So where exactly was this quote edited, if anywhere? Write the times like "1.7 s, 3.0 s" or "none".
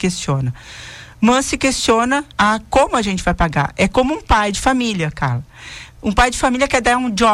2.3 s